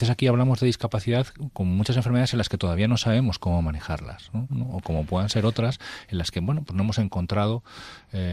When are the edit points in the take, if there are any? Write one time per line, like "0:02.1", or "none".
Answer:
0:04.5